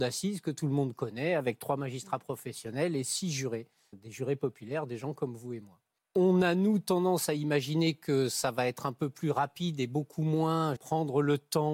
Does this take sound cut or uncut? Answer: cut